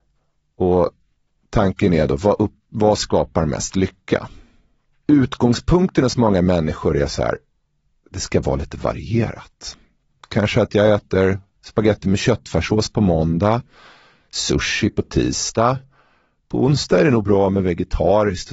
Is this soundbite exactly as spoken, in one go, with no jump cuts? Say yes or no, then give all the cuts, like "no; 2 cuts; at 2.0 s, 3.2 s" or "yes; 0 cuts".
yes; 0 cuts